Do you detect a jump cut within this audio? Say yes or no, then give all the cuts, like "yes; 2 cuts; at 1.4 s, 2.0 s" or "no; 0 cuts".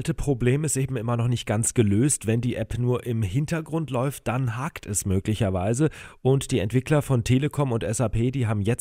no; 0 cuts